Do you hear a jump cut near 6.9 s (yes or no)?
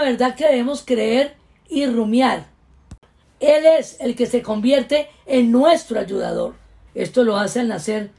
yes